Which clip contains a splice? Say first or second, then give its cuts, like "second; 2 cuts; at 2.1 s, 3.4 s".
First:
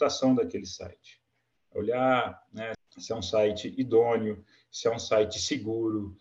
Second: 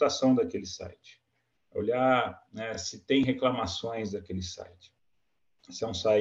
first; 1 cut; at 2.7 s